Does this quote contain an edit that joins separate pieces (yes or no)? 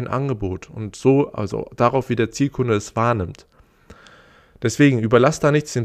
no